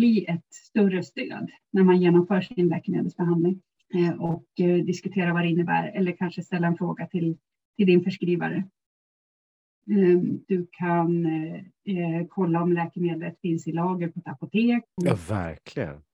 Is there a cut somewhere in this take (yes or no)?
yes